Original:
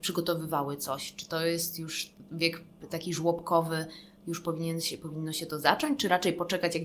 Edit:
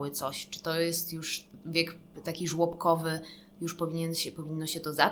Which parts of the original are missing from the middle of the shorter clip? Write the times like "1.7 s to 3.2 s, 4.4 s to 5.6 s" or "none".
none